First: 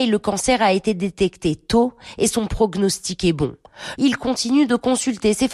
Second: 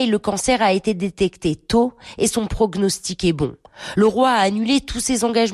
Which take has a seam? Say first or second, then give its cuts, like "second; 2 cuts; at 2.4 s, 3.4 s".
first; 1 cut; at 4.0 s